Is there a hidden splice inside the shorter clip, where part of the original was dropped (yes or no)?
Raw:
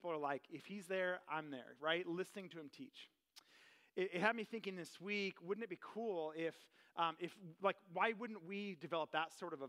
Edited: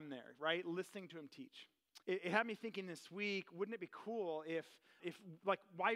yes